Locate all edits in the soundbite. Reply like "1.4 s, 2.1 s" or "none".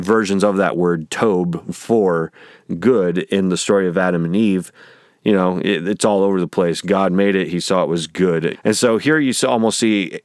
8.5 s